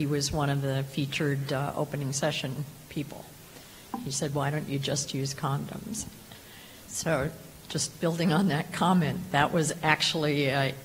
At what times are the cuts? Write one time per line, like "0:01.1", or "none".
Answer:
0:06.9